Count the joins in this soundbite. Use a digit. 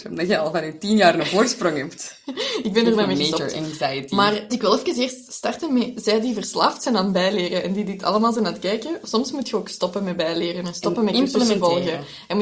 1